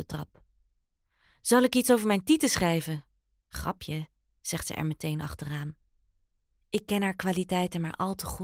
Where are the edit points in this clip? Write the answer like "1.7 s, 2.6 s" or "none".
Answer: 6.6 s